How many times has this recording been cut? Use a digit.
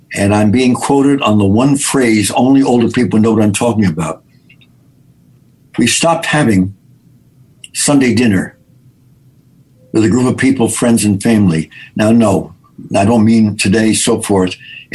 0